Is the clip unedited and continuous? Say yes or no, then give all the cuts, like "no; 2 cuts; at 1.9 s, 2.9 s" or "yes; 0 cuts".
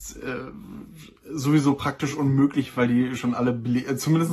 yes; 0 cuts